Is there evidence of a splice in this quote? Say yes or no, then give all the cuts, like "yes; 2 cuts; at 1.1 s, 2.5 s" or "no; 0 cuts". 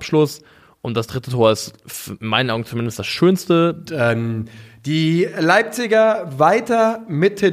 yes; 1 cut; at 3.9 s